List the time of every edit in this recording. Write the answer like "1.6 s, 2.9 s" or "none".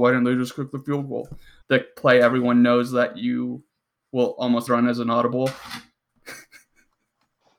1.6 s, 4.7 s